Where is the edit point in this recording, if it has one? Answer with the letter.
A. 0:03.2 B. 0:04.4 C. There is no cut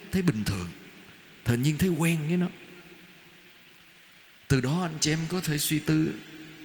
C